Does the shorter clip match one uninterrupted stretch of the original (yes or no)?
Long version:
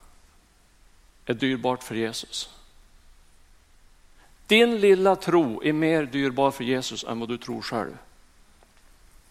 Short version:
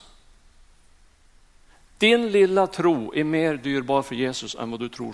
yes